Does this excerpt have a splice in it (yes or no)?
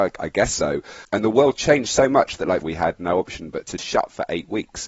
yes